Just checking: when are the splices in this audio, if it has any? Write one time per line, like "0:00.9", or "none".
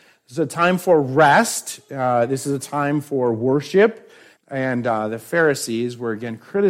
0:04.4